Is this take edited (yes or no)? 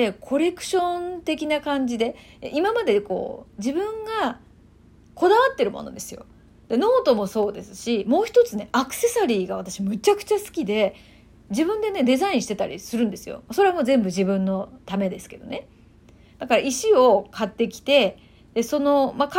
no